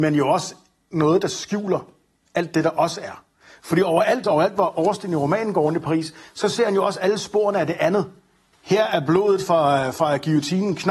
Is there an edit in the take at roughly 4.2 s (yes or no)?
yes